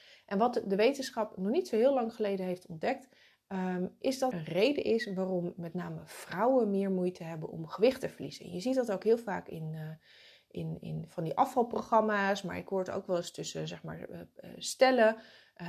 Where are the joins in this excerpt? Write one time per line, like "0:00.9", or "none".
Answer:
0:04.3